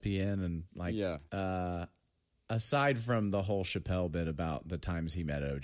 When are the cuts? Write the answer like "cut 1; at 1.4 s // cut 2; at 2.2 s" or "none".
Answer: cut 1; at 1.3 s